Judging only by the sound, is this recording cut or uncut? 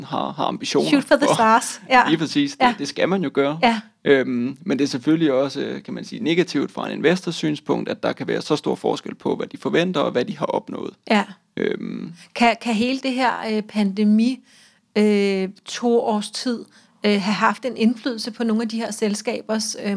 uncut